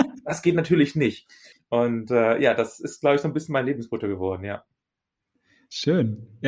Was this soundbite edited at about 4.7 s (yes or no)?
no